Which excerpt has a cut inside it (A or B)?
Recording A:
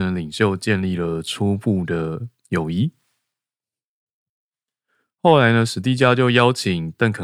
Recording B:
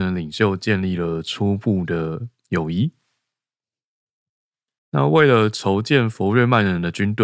B